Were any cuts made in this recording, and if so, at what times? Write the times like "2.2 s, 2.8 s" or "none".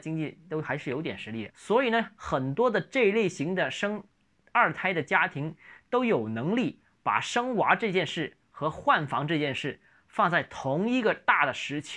1.5 s